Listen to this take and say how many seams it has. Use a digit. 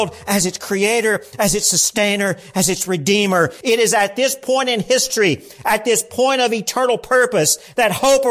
1